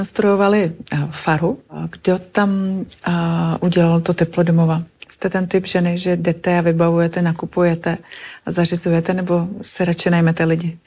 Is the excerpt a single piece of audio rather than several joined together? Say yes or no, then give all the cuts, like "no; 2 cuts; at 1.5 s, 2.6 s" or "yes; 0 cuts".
yes; 0 cuts